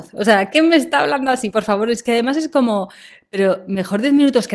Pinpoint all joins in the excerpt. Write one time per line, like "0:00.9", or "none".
none